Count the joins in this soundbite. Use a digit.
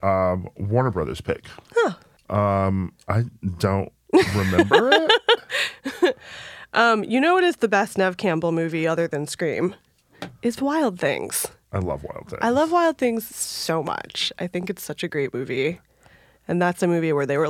1